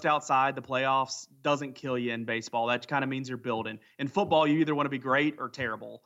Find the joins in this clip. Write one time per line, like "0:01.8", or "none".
none